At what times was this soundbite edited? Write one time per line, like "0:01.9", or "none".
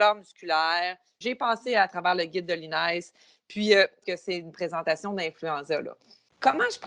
0:01.2
0:04.0